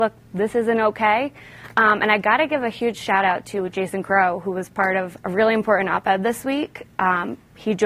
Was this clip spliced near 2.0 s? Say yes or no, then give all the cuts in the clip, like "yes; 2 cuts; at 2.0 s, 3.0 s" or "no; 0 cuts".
no; 1 cut; at 5.2 s